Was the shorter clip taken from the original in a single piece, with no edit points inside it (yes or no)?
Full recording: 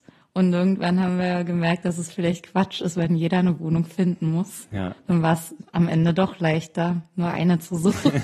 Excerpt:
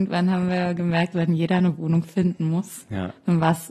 no